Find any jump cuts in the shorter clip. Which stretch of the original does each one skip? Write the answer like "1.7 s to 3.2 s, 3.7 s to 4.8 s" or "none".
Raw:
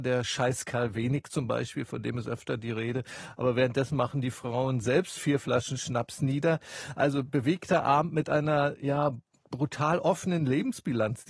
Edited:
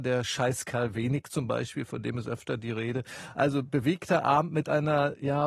3.3 s to 6.9 s